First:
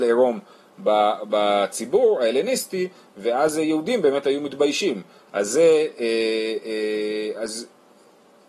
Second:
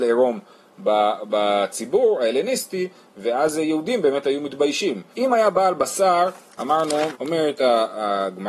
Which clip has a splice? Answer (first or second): second